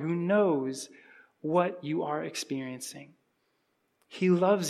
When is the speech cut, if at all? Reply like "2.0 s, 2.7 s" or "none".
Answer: none